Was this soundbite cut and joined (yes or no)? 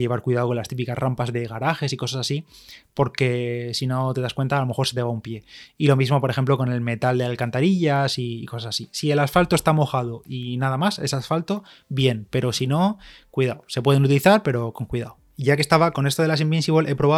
no